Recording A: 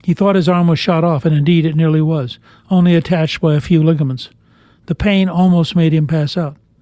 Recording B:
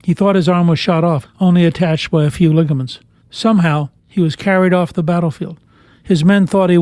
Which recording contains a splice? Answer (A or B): B